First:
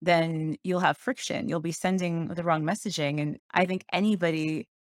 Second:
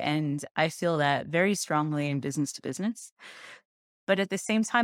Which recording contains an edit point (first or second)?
first